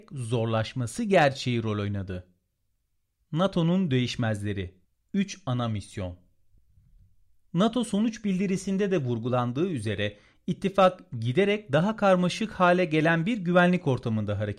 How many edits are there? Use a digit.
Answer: 0